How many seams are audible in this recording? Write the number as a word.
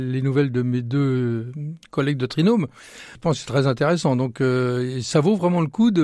one